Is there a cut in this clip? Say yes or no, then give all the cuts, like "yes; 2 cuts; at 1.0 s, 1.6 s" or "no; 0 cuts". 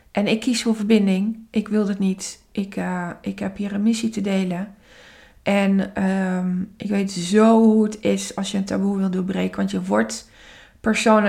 no; 0 cuts